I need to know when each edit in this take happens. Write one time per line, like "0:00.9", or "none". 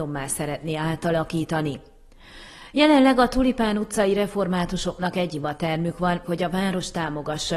0:06.2